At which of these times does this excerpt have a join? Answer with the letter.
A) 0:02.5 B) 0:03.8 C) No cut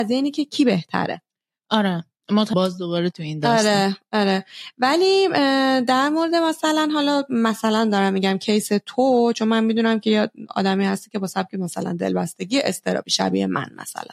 A